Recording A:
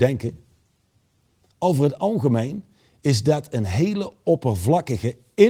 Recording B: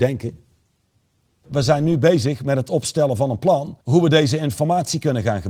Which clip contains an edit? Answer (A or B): B